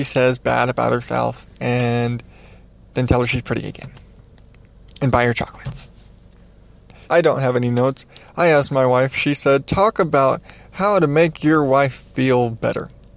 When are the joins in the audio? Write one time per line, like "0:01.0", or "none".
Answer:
0:07.0